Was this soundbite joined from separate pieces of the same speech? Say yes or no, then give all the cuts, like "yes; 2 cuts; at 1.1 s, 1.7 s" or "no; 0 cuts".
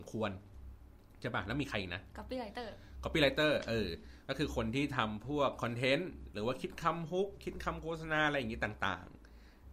no; 0 cuts